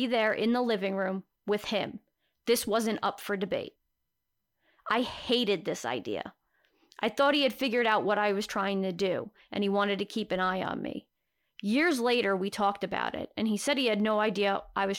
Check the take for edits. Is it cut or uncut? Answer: uncut